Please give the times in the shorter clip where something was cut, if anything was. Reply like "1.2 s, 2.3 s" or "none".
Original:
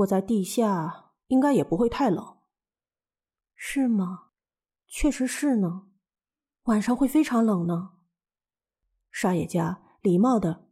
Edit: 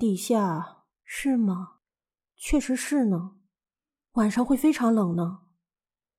0.9 s